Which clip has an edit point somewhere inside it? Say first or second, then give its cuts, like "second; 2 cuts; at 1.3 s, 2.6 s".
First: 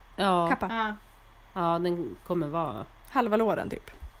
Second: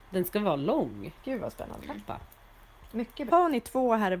second; 2 cuts; at 1.8 s, 3.3 s